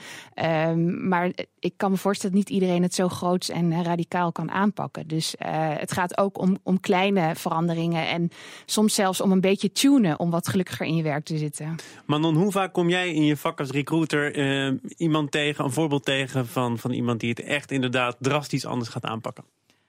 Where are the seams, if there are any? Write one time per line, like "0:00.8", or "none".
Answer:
0:10.2